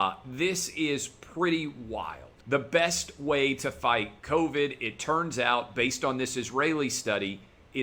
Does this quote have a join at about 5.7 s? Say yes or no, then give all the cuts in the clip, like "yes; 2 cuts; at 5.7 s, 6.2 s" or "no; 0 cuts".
no; 1 cut; at 2.4 s